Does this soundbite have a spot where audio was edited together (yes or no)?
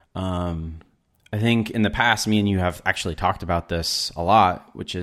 no